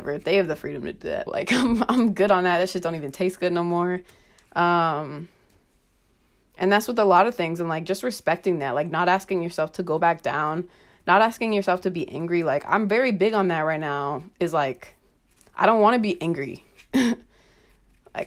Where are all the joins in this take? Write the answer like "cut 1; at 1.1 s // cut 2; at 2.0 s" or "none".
cut 1; at 1.3 s